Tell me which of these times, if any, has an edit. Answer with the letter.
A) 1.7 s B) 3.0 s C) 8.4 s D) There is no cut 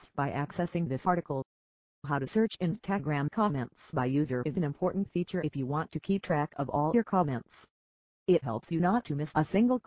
C